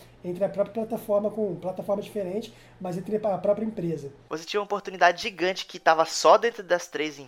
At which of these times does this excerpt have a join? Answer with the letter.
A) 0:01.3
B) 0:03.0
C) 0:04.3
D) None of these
C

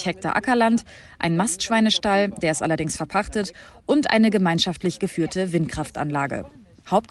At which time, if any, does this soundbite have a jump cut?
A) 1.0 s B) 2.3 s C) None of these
C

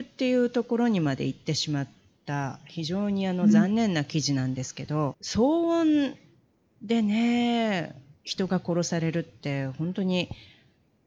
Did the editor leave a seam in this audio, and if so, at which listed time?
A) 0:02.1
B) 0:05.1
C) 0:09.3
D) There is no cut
B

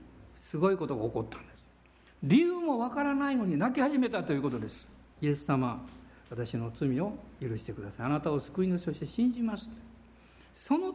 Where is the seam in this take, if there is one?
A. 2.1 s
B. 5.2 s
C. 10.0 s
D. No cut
B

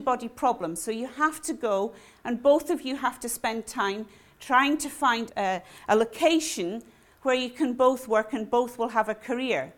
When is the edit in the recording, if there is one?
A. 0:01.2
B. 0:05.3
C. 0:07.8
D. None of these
B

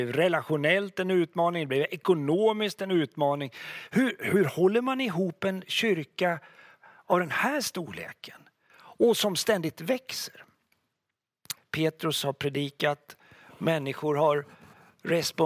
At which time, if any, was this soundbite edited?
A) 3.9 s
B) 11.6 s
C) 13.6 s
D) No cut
B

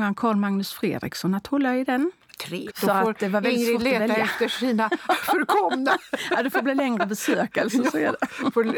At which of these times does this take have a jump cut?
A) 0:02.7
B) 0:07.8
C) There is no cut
A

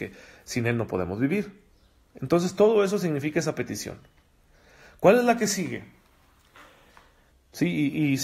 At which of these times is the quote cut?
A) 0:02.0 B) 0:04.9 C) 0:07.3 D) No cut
C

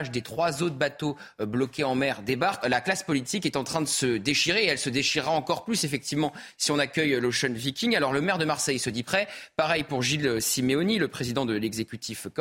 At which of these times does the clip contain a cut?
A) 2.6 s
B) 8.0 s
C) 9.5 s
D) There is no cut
A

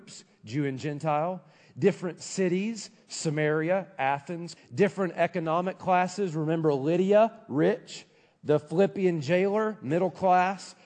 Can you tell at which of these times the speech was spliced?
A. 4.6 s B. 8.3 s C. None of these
A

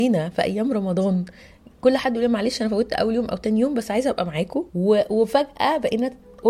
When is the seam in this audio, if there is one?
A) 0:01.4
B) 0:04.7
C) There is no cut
B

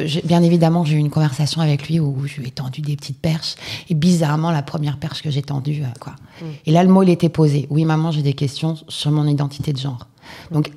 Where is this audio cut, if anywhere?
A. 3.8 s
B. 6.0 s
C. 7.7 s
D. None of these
B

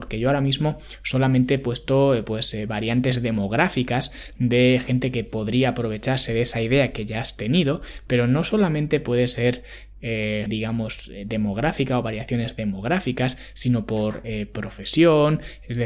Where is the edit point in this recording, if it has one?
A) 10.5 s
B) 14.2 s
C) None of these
A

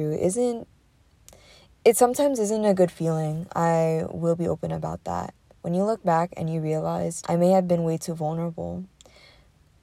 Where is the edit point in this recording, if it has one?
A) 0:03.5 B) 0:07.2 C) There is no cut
B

